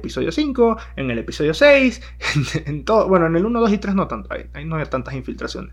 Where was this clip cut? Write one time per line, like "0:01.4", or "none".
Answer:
none